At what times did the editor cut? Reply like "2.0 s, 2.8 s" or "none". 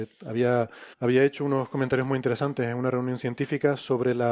0.9 s